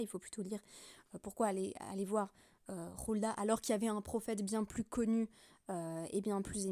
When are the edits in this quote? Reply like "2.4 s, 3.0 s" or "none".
none